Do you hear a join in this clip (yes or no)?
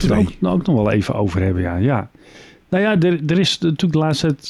no